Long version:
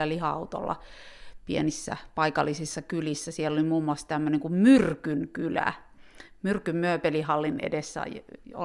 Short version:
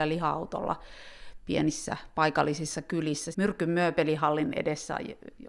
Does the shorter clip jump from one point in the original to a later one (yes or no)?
yes